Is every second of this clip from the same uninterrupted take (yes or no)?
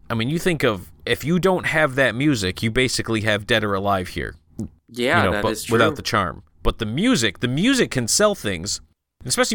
yes